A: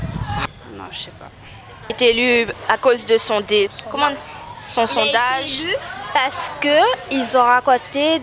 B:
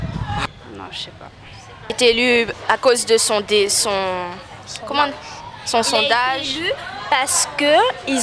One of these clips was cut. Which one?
A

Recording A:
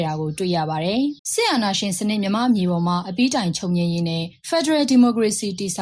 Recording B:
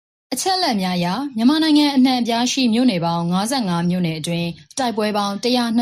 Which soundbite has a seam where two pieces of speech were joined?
A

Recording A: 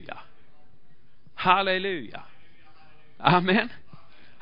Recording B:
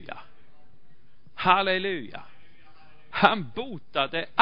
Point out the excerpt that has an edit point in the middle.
B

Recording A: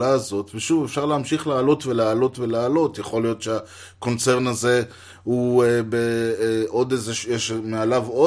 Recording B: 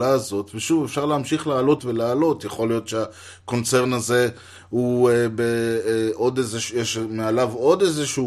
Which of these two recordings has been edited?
B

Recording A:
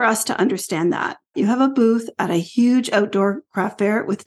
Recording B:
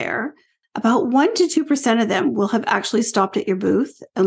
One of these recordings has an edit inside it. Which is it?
A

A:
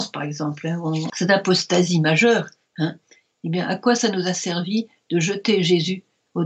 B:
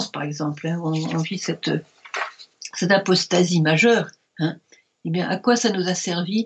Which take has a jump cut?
A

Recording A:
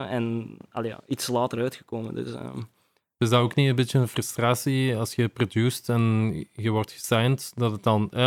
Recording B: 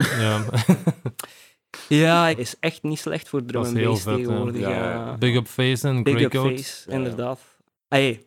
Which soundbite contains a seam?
B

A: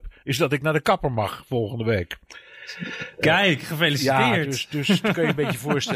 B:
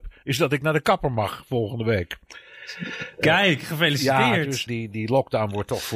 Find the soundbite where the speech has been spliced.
B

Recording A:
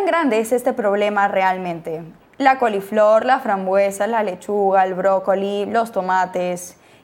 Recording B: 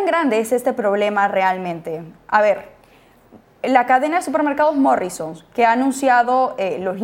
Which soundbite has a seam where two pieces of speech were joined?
A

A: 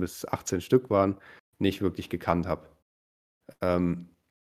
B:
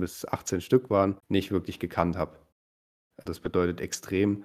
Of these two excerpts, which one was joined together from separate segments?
B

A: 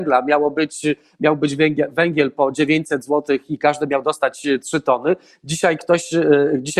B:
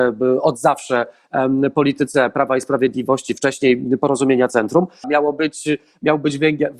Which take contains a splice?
B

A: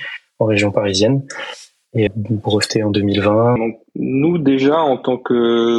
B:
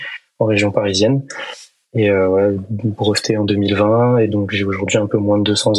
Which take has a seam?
A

